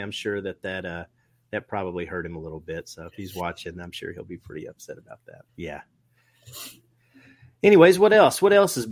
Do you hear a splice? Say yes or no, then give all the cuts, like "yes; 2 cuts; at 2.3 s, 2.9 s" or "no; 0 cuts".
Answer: yes; 1 cut; at 5.5 s